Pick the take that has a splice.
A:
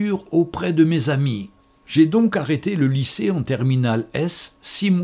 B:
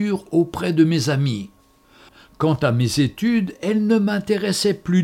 A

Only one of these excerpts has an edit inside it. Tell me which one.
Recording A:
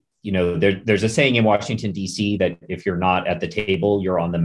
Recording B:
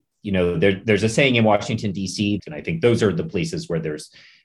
B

